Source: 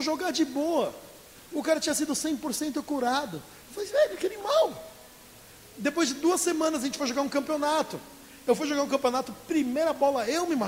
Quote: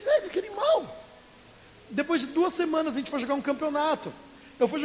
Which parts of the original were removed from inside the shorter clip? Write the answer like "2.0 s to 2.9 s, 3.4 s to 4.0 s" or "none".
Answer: none